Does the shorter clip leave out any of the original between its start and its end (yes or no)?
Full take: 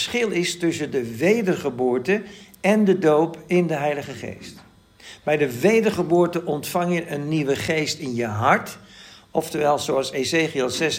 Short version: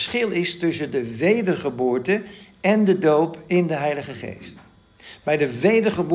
no